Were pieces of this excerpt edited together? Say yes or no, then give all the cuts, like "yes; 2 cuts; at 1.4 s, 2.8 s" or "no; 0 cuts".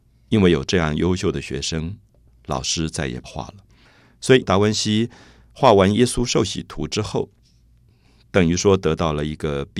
yes; 2 cuts; at 3.2 s, 4.4 s